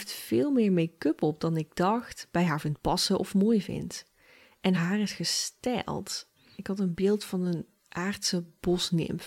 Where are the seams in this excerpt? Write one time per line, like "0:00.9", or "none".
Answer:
0:04.7
0:06.6